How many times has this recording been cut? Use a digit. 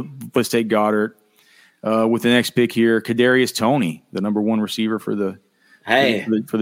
0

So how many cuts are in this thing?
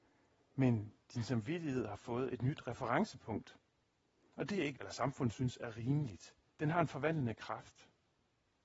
2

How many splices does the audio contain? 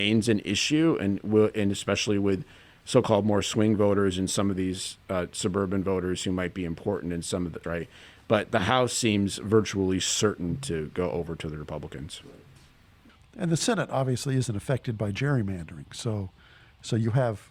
1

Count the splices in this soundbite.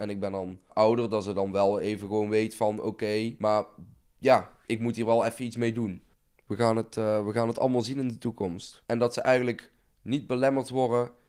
1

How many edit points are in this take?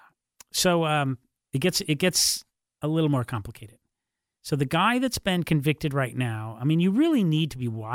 0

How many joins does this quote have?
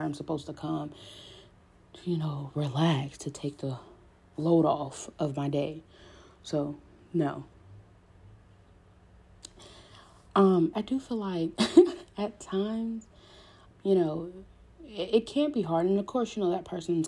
2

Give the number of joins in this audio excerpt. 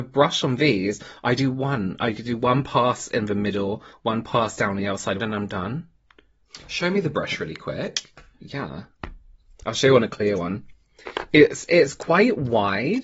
1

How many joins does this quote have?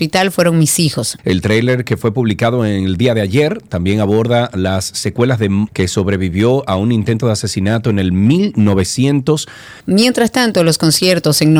3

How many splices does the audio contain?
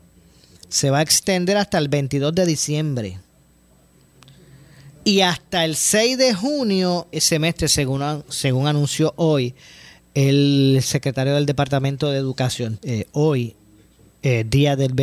3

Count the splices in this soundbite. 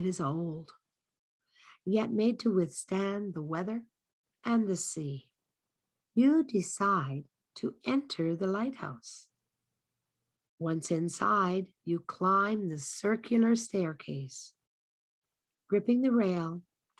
0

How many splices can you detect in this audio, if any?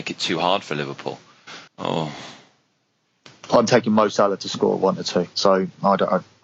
2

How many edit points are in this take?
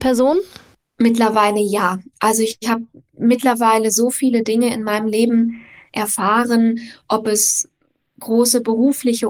0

